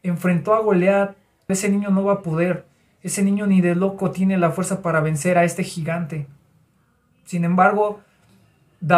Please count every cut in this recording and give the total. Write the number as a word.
one